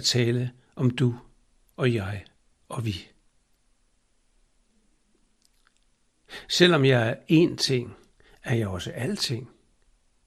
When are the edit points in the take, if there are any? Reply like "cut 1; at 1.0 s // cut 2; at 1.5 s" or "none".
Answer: none